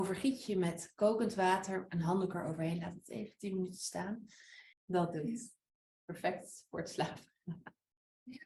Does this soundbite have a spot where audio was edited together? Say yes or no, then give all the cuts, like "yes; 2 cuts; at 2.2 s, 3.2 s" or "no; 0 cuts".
yes; 1 cut; at 4.7 s